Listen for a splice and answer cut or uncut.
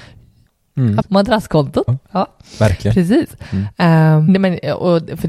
cut